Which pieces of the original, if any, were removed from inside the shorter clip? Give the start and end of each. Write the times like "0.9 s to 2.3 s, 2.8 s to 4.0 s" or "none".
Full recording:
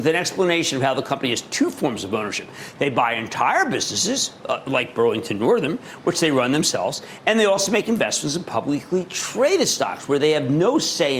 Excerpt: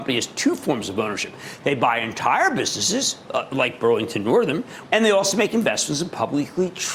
6.0 s to 7.2 s